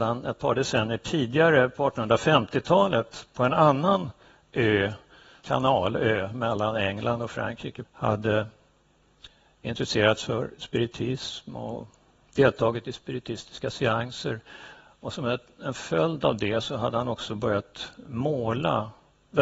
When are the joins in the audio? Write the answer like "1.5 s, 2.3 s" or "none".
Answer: 7.8 s